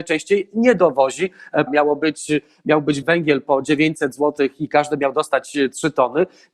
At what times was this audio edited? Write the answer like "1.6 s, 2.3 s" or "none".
1.7 s, 3.0 s

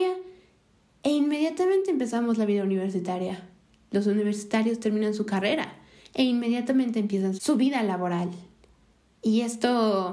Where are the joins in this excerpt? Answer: 7.4 s

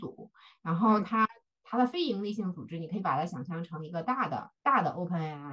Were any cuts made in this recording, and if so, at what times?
4.6 s

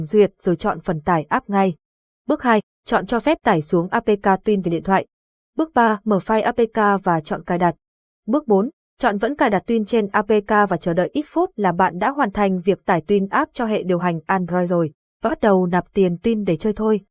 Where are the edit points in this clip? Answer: none

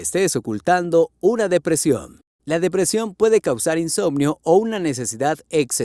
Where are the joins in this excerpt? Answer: 2.4 s

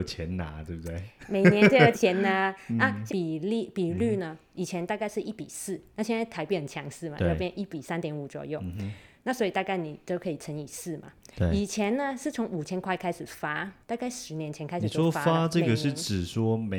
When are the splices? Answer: 1.9 s, 3.1 s, 13.8 s

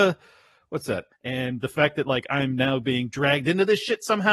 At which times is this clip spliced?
1.1 s

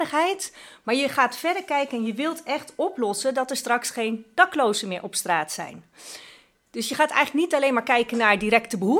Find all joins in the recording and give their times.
none

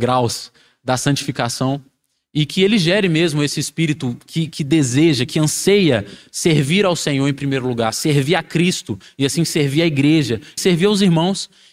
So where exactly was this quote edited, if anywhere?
10.6 s

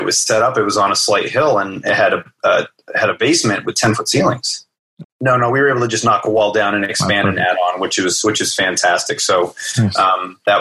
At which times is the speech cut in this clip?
5.0 s

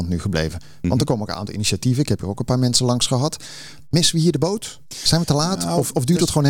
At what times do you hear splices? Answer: none

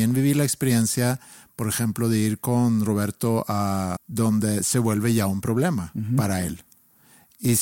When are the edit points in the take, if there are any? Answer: 4.0 s

